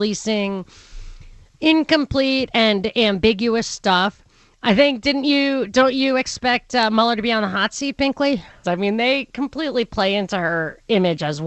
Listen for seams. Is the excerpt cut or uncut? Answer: cut